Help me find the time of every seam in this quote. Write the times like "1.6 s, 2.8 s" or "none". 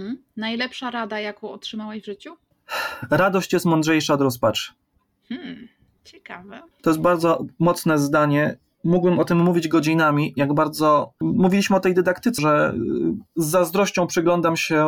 6.7 s, 11.2 s, 12.4 s